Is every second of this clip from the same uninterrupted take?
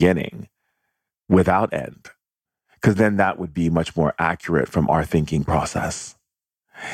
yes; 0 cuts

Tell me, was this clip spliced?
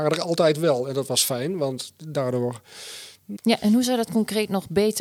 yes; 1 cut; at 3.4 s

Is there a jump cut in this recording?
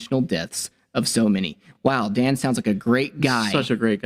no; 0 cuts

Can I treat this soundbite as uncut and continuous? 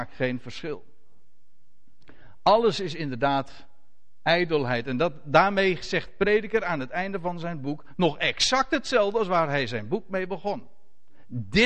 yes; 0 cuts

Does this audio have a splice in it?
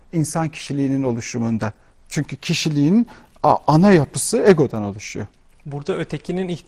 no; 0 cuts

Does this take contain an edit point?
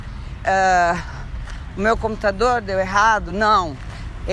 no; 0 cuts

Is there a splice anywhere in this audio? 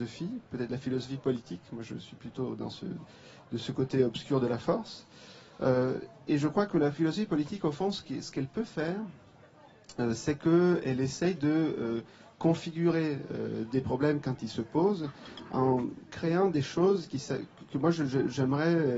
no; 0 cuts

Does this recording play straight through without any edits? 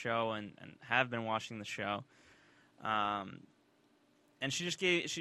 yes; 0 cuts

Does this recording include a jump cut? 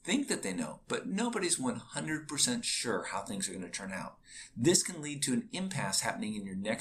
no; 0 cuts

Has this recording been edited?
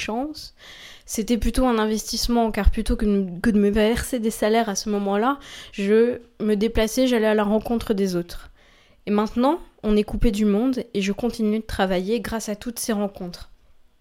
no; 0 cuts

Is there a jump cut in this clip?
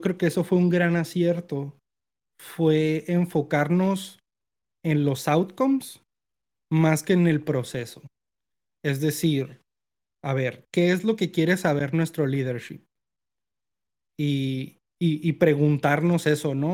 no; 0 cuts

